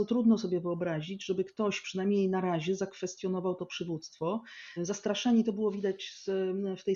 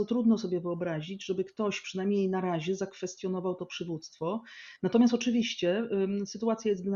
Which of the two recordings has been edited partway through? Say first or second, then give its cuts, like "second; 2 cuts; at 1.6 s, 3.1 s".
first; 1 cut; at 4.8 s